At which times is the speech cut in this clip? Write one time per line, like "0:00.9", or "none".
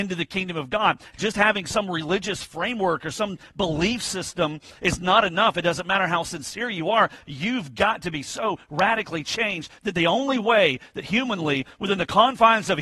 none